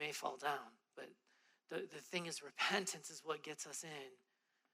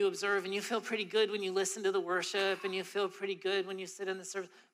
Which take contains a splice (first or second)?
first